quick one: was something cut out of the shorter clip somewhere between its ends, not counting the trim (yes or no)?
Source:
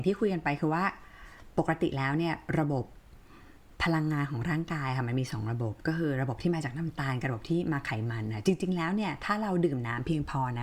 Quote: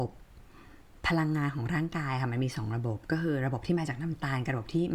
no